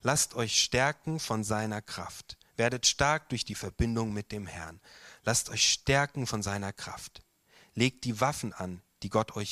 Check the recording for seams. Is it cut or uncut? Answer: uncut